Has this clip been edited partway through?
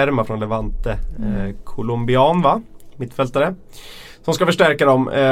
no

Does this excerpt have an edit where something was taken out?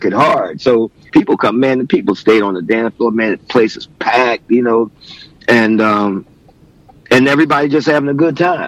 no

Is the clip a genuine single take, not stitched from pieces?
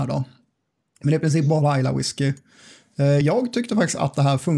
yes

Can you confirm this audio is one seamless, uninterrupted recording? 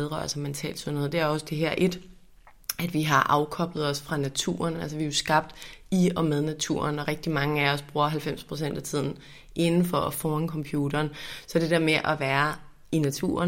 yes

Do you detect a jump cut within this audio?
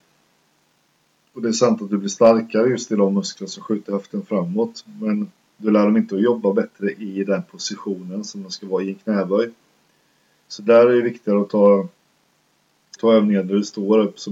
yes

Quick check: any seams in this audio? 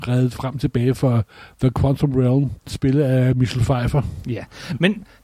yes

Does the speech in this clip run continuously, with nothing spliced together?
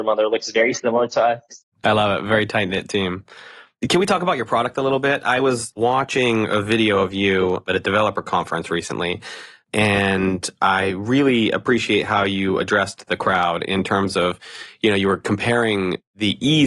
no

